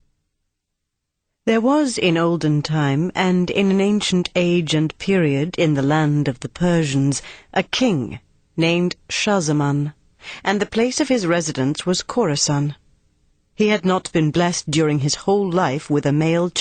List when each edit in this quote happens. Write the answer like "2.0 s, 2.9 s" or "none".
none